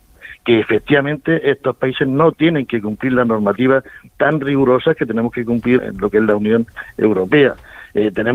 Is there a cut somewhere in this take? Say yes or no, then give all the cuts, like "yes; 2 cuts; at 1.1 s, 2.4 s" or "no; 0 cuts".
yes; 1 cut; at 5.8 s